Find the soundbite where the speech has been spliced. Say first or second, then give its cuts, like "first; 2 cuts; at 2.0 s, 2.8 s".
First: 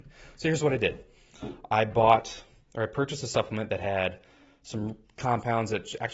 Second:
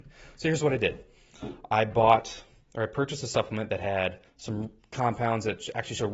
second; 1 cut; at 4.3 s